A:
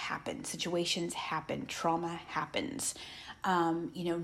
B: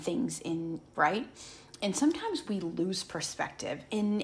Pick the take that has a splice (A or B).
B